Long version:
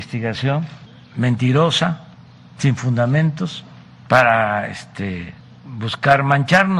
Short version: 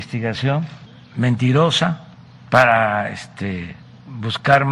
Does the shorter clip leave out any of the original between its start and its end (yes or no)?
yes